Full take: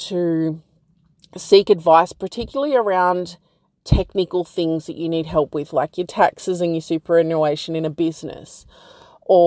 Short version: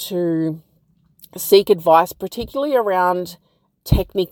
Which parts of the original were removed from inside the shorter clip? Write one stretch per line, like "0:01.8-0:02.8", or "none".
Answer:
none